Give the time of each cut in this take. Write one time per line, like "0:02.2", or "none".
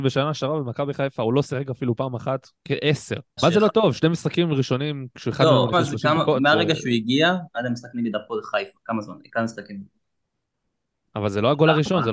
0:03.4
0:05.7